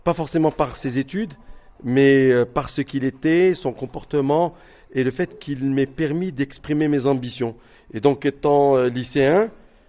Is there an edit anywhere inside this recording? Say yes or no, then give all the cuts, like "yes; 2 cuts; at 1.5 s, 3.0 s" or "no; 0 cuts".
no; 0 cuts